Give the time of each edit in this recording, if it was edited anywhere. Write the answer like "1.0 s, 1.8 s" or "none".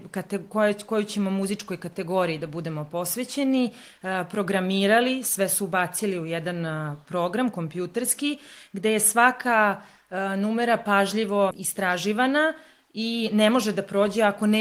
11.5 s